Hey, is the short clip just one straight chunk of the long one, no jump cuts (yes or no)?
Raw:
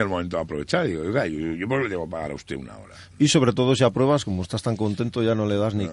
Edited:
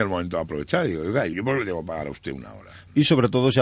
no